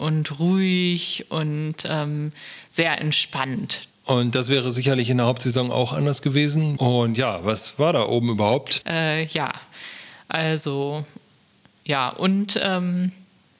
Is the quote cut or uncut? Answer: cut